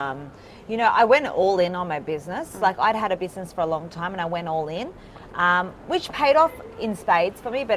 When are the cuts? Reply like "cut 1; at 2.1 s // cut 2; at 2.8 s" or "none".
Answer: none